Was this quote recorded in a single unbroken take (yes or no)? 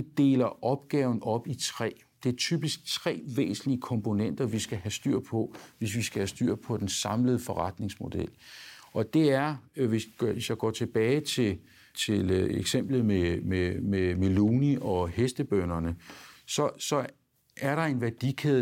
yes